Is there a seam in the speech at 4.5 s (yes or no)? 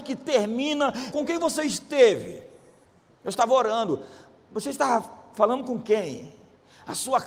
no